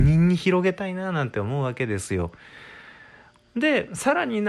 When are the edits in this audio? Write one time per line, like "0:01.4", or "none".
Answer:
0:03.4